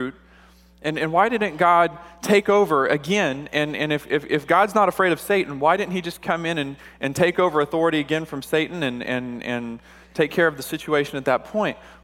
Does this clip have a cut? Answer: no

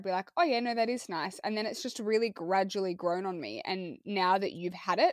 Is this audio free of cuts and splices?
yes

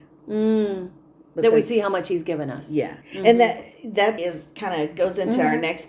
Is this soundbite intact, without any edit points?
no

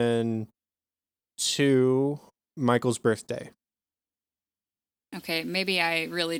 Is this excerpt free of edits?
yes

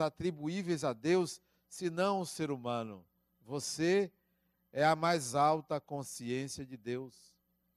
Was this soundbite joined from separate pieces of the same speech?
no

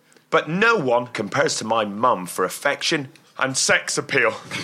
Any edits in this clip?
yes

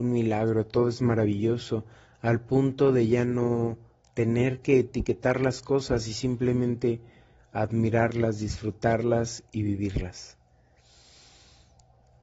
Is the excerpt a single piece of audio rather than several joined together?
yes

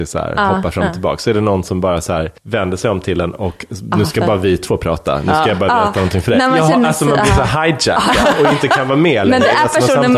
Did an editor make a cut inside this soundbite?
yes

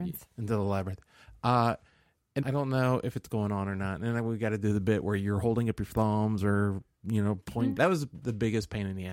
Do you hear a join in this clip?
yes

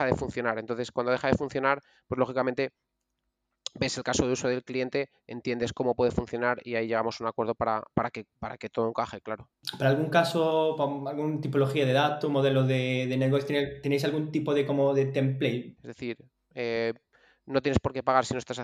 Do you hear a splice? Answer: yes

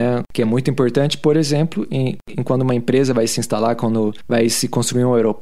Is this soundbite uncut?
yes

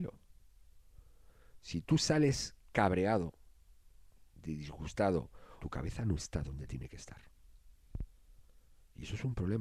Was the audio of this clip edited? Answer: yes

